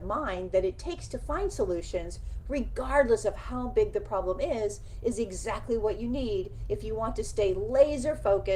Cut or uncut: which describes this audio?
uncut